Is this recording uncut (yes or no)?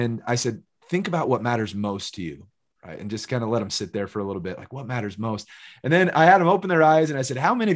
yes